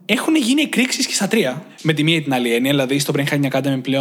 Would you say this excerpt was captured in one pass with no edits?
yes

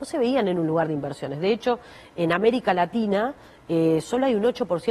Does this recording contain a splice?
no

